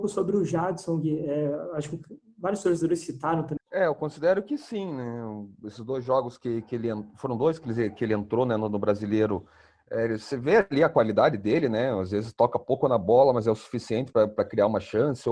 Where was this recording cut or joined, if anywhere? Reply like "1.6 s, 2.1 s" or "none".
3.6 s